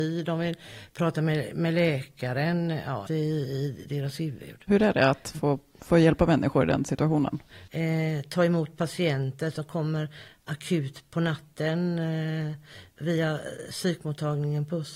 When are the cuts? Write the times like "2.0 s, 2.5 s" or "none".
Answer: 3.1 s, 7.7 s